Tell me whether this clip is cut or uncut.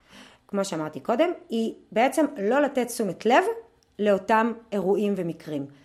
uncut